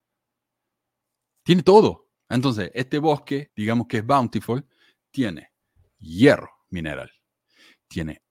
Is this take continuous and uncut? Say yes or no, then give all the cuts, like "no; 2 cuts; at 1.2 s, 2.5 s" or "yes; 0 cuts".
no; 2 cuts; at 2.1 s, 3.5 s